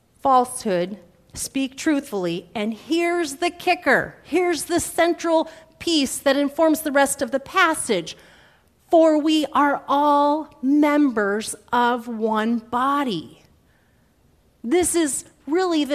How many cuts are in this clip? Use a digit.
0